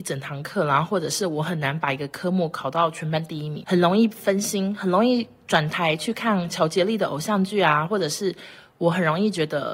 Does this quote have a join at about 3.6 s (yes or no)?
yes